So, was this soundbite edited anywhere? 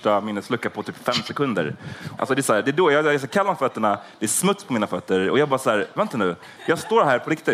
yes; 1 cut; at 2.2 s

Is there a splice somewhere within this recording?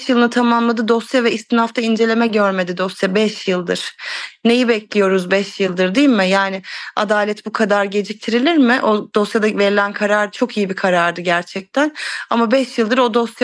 no; 0 cuts

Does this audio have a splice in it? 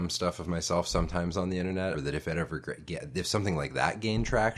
yes; 1 cut; at 1.9 s

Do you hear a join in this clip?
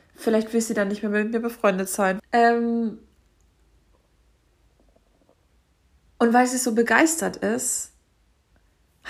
yes; 1 cut; at 2.2 s

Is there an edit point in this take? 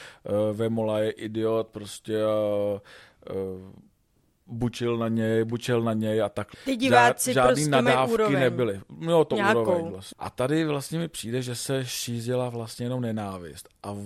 yes; 2 cuts; at 6.5 s, 10.1 s

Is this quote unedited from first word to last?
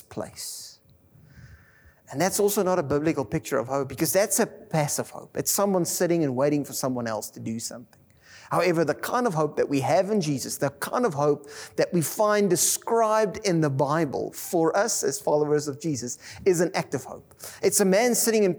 yes; 0 cuts

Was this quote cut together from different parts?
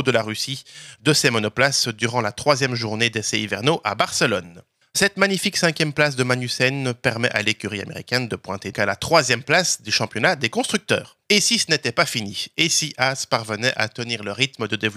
yes; 3 cuts; at 4.8 s, 8.7 s, 11.2 s

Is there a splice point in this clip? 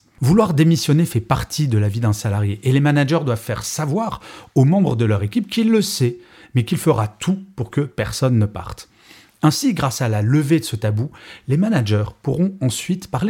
no; 0 cuts

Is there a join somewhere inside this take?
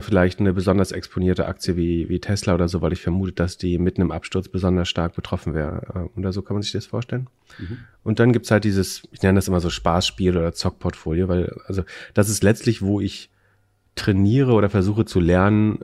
no; 0 cuts

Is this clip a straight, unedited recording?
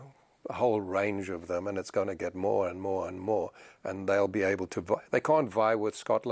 yes; 0 cuts

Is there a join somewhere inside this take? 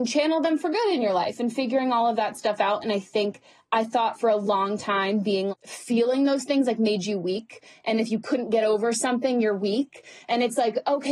yes; 1 cut; at 5.5 s

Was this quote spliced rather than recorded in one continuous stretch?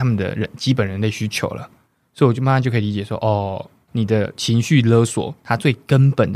no; 0 cuts

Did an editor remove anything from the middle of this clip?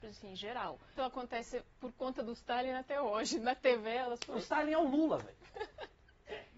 yes; 1 cut; at 1.0 s

